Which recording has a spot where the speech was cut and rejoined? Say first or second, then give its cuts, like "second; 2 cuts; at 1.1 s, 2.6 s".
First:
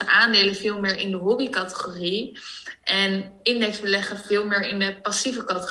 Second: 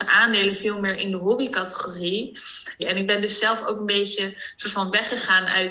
second; 1 cut; at 2.8 s